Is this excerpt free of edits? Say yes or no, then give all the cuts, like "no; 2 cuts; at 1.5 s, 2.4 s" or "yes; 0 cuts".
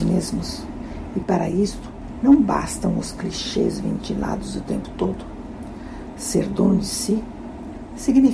yes; 0 cuts